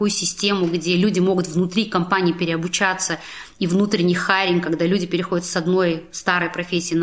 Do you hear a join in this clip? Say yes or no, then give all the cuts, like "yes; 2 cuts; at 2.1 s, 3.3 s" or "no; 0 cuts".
no; 0 cuts